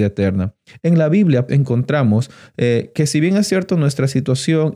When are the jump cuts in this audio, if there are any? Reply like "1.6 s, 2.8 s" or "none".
1.5 s